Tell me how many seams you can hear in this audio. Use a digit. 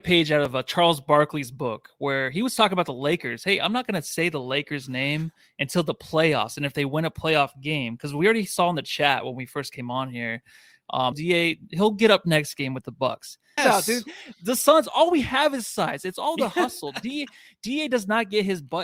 2